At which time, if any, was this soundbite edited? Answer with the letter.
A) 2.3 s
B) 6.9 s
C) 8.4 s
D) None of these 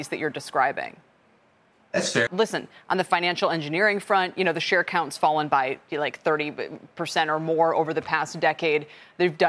A